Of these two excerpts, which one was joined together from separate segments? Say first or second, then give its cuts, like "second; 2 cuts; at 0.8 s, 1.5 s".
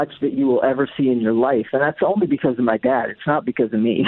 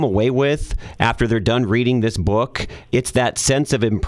second; 1 cut; at 2.9 s